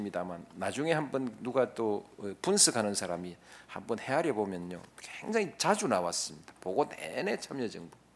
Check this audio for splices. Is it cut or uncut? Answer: uncut